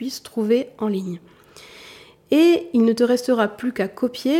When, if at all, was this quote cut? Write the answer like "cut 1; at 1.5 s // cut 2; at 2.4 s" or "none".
none